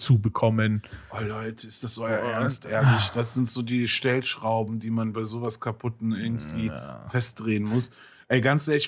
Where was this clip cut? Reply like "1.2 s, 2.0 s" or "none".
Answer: none